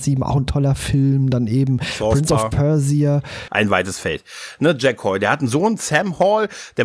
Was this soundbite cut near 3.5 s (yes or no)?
yes